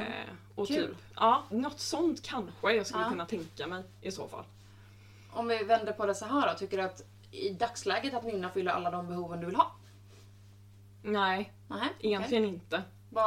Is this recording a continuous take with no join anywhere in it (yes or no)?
no